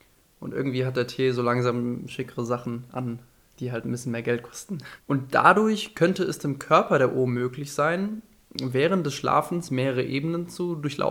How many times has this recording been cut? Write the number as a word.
one